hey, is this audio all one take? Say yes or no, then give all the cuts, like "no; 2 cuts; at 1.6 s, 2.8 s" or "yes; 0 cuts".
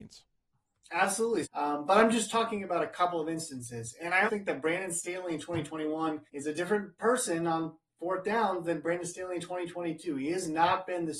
no; 3 cuts; at 1.4 s, 4.3 s, 6.3 s